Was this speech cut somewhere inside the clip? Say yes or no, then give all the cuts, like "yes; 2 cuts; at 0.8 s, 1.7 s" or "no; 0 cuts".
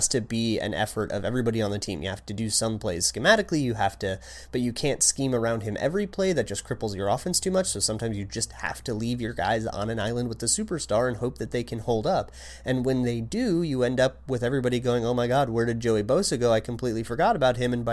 no; 0 cuts